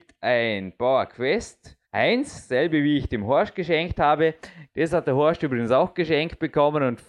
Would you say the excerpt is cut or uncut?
cut